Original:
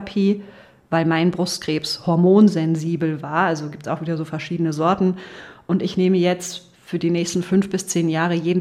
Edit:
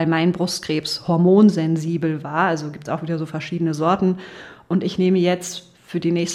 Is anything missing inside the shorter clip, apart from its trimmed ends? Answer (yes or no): no